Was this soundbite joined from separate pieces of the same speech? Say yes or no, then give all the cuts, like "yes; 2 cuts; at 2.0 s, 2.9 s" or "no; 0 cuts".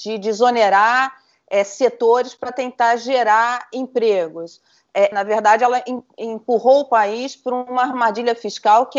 yes; 1 cut; at 5.1 s